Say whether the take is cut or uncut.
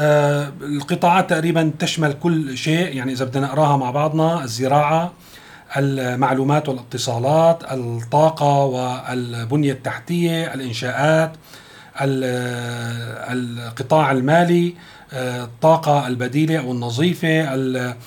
uncut